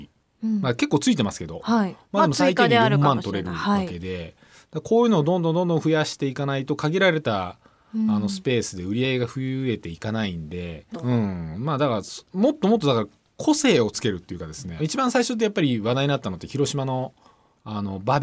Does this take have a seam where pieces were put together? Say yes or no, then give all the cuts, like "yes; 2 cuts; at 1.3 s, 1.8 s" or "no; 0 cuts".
yes; 2 cuts; at 10.9 s, 14.8 s